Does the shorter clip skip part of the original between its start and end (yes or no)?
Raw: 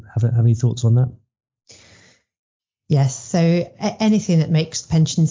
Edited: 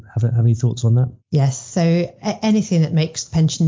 yes